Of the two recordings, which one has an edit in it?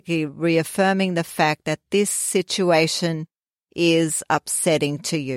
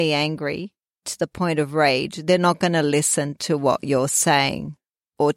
second; 1 cut; at 1.0 s

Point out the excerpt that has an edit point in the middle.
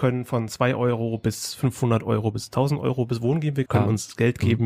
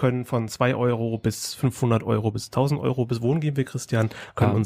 first; 1 cut; at 3.7 s

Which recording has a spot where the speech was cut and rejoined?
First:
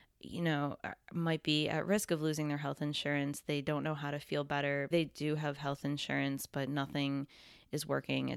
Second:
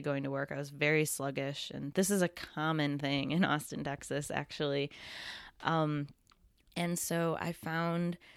first; 1 cut; at 4.9 s

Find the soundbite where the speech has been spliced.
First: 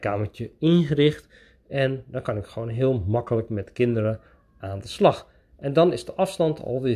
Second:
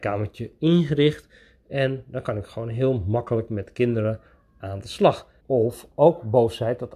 second; 1 cut; at 5.4 s

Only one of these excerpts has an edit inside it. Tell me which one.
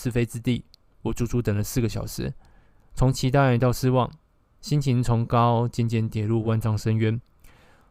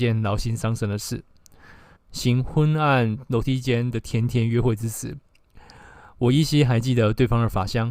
second; 1 cut; at 2.0 s

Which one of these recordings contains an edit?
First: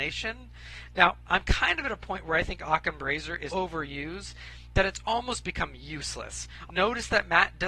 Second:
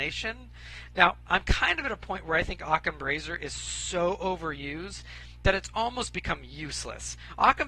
first; 2 cuts; at 3.5 s, 6.7 s

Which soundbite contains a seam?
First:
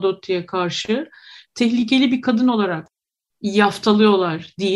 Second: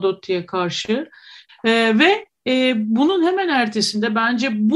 second; 1 cut; at 1.5 s

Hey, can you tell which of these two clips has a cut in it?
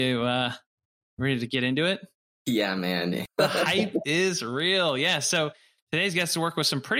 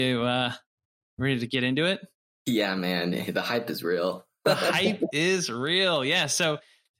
first; 1 cut; at 3.3 s

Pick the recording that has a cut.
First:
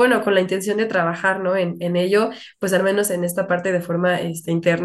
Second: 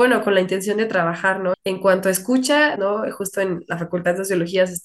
second; 2 cuts; at 1.5 s, 2.8 s

